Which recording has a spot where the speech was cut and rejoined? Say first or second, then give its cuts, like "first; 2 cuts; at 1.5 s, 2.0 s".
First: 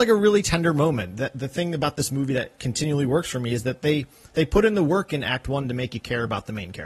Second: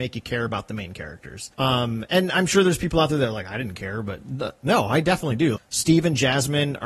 second; 2 cuts; at 1.5 s, 5.6 s